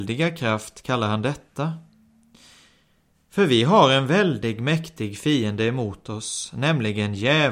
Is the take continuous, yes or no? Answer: yes